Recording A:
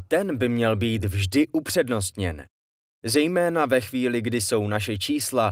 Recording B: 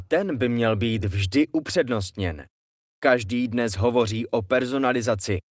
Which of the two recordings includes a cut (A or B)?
B